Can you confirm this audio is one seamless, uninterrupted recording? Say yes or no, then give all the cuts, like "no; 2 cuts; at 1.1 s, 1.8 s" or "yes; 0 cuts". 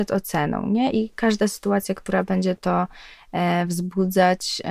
yes; 0 cuts